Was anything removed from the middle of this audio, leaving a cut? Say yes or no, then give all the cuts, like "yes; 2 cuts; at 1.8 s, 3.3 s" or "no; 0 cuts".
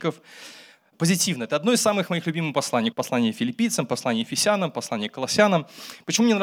yes; 2 cuts; at 0.9 s, 2.9 s